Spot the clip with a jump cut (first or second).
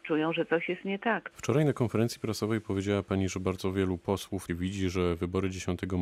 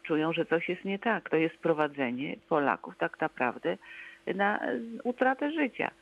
first